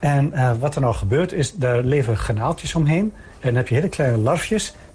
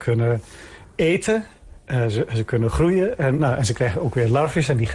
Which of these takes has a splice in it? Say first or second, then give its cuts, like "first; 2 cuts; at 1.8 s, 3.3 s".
second; 1 cut; at 3.4 s